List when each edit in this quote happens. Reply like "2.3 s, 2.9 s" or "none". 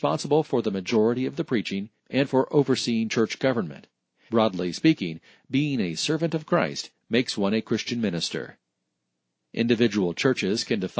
4.3 s